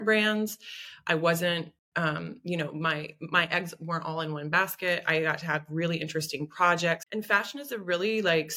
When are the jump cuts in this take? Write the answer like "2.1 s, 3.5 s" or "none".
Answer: 7.0 s